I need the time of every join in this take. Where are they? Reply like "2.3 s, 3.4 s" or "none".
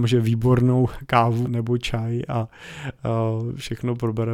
1.4 s